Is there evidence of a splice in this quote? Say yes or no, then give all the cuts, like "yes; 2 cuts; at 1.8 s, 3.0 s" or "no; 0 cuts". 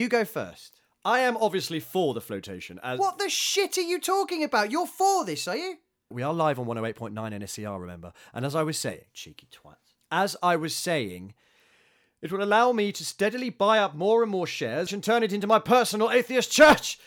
yes; 2 cuts; at 6.1 s, 14.9 s